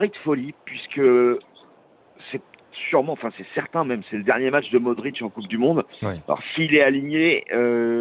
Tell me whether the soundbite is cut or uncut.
uncut